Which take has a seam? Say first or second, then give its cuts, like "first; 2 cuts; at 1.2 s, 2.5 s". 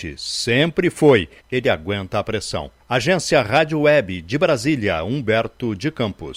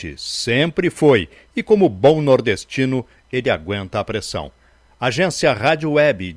first; 2 cuts; at 1.4 s, 2.8 s